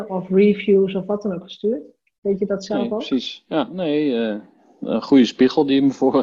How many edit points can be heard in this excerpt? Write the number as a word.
zero